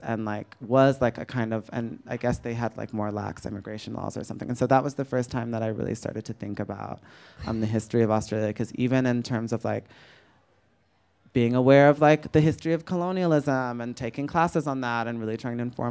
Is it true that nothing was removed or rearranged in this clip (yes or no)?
yes